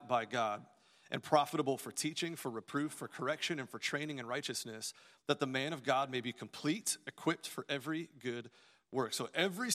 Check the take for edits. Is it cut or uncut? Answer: uncut